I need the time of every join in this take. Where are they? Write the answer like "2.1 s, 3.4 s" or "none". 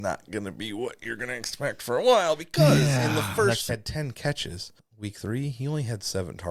3.7 s, 4.8 s